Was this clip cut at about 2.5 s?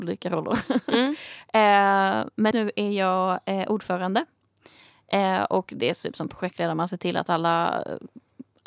yes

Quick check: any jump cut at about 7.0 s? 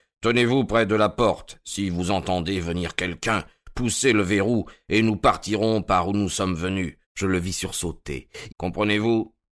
yes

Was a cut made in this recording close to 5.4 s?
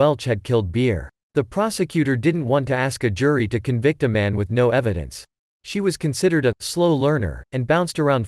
yes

